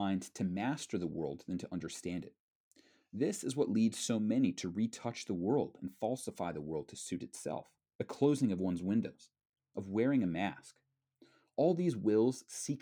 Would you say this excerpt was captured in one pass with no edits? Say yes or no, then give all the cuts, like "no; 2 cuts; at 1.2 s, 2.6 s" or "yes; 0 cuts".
no; 2 cuts; at 7.9 s, 9.6 s